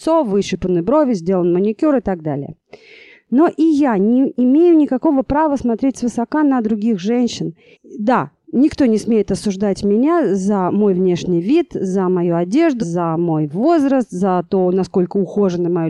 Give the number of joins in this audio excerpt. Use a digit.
2